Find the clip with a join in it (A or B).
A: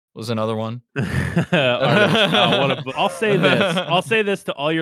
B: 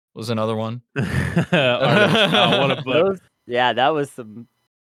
A